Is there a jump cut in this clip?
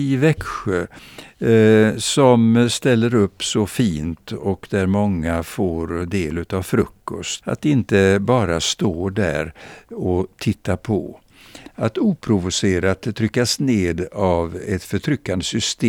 yes; 2 cuts; at 7.4 s, 11.7 s

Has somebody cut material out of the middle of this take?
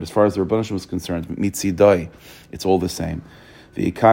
no; 0 cuts

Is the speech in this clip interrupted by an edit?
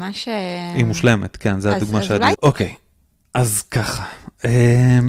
yes; 1 cut; at 2.3 s

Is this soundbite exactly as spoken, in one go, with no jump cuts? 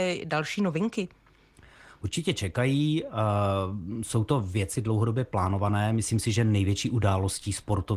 yes; 0 cuts

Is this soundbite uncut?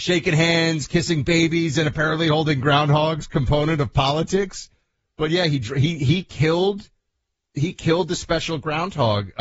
yes; 0 cuts

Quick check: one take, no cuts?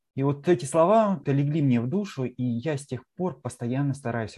no; 1 cut; at 1.2 s

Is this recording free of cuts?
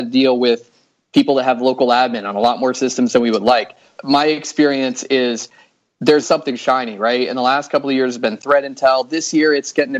no; 2 cuts; at 4.0 s, 6.2 s

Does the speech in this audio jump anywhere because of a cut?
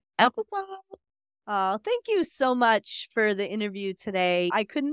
no; 0 cuts

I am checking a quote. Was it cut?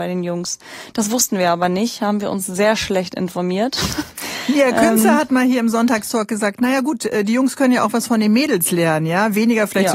no; 0 cuts

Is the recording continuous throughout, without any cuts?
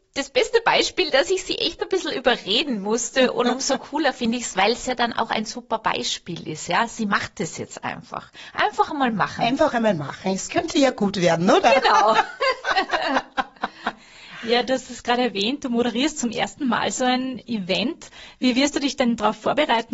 yes; 0 cuts

